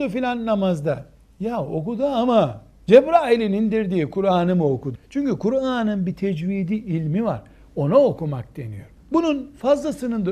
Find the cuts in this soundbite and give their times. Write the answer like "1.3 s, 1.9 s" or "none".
5.0 s, 9.0 s